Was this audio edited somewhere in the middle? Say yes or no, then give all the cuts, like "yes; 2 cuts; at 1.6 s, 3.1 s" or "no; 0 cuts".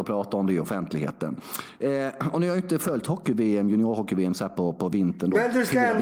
no; 0 cuts